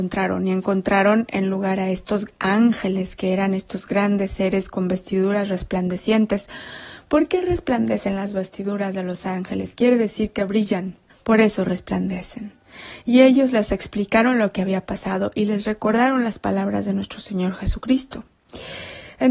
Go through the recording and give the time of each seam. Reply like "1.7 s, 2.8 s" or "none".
11.1 s